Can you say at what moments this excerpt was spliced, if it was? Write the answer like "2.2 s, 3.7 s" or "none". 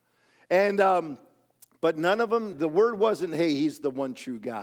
2.5 s